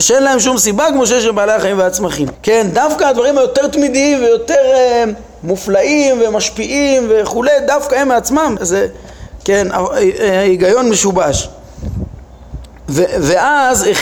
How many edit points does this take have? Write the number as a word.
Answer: two